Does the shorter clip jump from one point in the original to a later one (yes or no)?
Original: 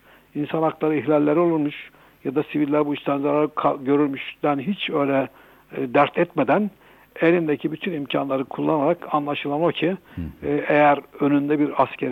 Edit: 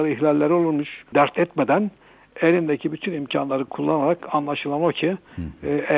yes